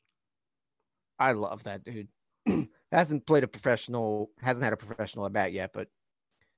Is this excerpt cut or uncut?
uncut